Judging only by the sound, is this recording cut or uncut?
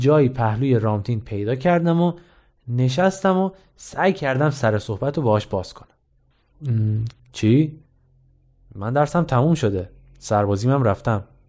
cut